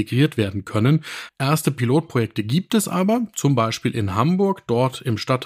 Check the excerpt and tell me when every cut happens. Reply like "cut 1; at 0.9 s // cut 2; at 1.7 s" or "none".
cut 1; at 1.3 s